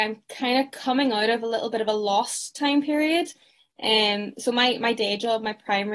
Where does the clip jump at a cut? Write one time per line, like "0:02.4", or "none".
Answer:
none